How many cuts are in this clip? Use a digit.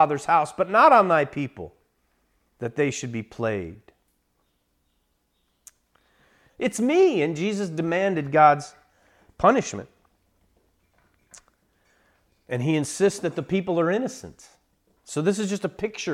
1